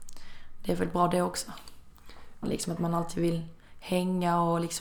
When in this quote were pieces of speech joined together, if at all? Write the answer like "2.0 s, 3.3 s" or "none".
2.4 s